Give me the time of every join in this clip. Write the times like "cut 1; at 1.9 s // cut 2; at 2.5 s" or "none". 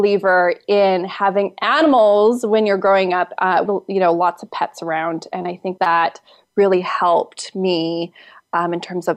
cut 1; at 3.7 s // cut 2; at 5.8 s

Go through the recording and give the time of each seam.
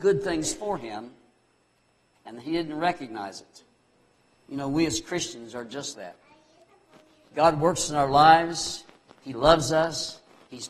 cut 1; at 5.9 s

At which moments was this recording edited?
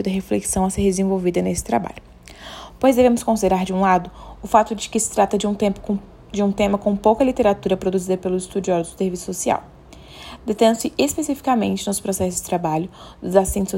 none

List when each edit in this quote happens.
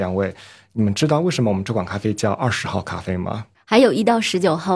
none

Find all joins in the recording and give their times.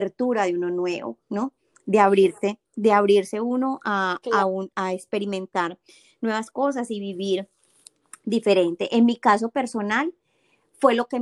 none

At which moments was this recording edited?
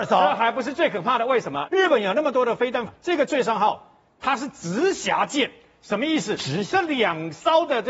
cut 1; at 1.7 s // cut 2; at 2.9 s

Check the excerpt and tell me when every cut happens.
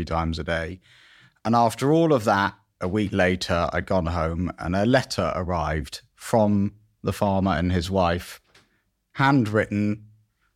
none

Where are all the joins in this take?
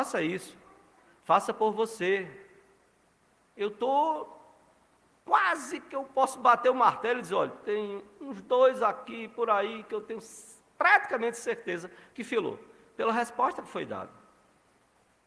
none

